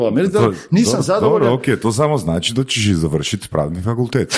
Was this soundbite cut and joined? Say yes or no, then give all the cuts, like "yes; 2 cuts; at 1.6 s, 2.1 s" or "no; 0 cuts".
no; 0 cuts